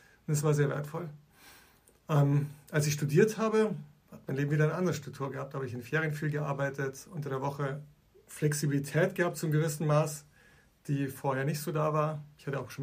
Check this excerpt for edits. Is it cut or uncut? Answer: uncut